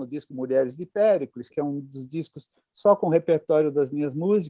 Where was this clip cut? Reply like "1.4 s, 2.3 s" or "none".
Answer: 1.5 s

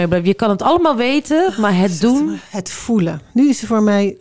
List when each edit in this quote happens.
none

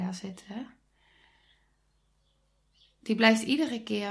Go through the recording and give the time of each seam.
none

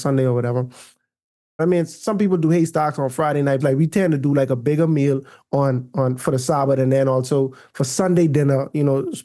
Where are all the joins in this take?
1.6 s, 3.6 s

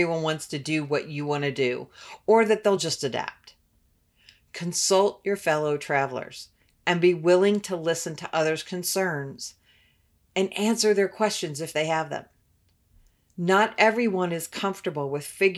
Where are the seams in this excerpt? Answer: none

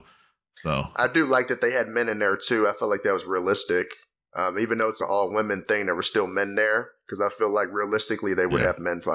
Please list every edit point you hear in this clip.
5.0 s

